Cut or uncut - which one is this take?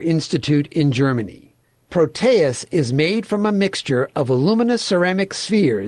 cut